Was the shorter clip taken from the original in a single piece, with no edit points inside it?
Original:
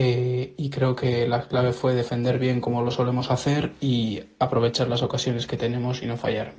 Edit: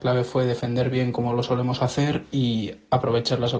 yes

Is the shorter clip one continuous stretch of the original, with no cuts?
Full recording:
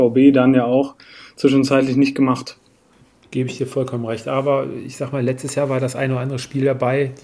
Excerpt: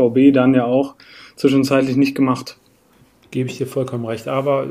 yes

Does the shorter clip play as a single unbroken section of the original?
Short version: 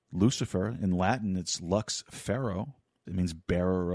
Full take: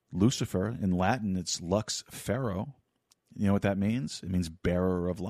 no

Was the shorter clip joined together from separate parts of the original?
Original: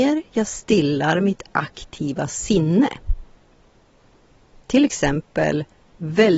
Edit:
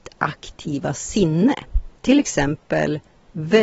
yes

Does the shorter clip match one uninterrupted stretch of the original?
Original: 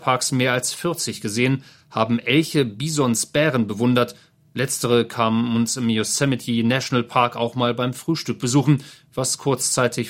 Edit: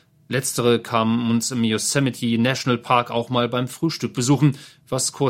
yes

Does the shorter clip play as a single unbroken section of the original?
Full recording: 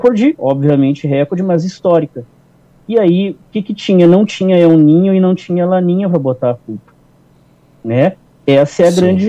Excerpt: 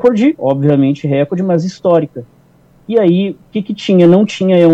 yes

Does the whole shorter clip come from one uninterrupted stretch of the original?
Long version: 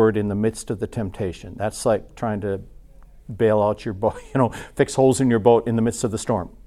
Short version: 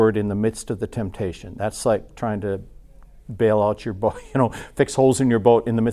yes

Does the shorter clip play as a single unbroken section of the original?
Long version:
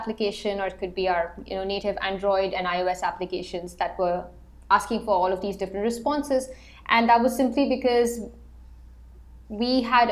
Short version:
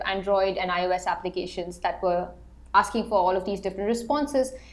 yes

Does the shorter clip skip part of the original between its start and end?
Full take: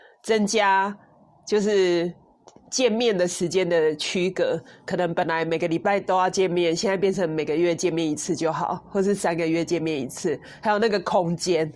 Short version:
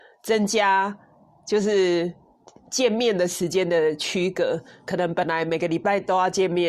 no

